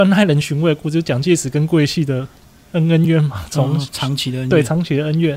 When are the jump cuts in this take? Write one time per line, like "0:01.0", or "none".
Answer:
0:03.0